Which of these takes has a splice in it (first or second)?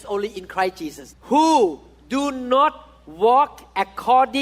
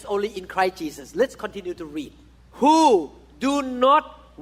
first